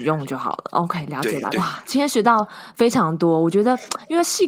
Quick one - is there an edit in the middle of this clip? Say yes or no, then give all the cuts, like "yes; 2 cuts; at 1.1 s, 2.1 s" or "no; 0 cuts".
yes; 1 cut; at 1.5 s